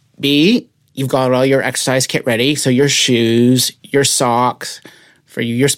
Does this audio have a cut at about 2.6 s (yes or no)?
no